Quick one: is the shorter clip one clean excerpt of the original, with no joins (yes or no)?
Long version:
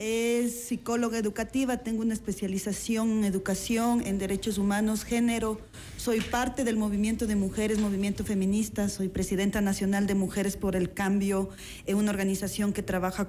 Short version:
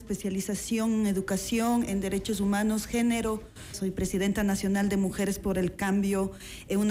no